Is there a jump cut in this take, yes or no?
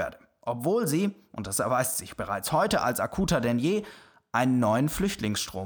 no